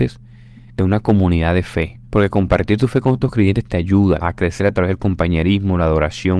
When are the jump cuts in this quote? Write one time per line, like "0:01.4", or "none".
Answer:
0:02.0
0:04.2